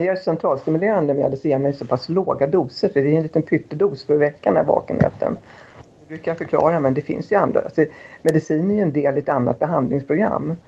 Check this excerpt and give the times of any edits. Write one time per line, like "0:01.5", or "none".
none